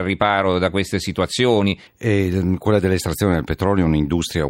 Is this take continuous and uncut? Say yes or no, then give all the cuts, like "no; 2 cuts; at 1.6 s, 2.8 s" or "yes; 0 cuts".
no; 1 cut; at 1.9 s